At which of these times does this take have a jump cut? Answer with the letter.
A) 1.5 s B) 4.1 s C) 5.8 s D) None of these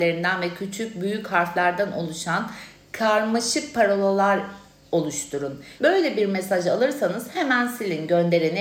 C